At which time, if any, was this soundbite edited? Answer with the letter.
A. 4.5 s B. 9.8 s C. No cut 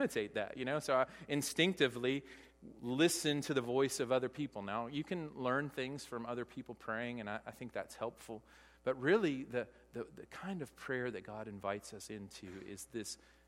C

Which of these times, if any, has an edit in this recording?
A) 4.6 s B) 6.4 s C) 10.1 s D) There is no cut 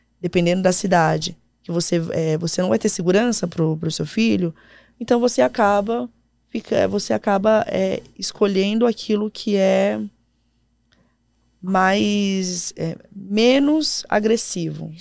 D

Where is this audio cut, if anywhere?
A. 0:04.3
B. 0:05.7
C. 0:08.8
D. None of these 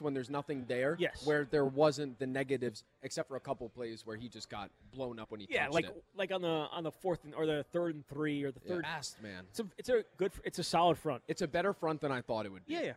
C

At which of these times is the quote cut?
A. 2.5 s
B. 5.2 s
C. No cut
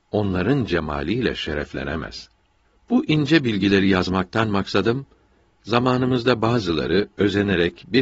C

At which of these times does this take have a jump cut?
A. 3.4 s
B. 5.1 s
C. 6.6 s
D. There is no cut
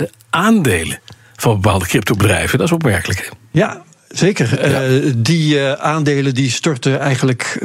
D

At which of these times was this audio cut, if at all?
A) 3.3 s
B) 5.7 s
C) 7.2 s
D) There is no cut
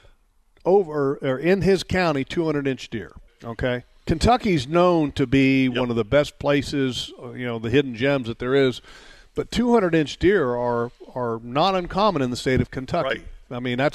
A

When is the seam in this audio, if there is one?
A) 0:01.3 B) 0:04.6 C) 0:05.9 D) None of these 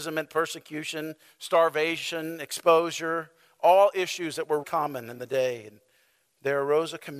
B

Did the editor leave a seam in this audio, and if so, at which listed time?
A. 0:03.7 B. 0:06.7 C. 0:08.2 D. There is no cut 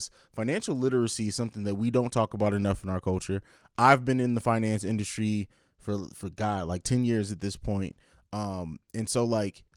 D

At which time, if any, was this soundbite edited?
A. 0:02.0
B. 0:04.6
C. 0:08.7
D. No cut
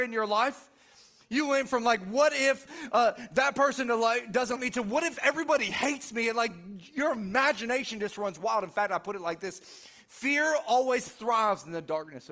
B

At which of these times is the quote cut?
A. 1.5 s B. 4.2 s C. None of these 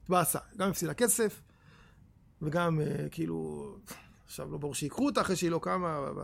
C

